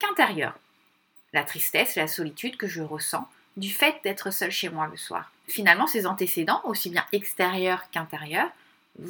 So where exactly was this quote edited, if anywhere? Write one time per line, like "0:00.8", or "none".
none